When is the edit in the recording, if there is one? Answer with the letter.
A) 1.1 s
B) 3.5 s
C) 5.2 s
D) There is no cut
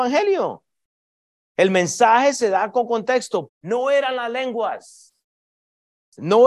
B